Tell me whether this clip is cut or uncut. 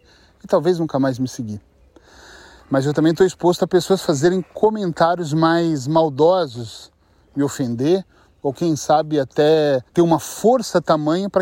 cut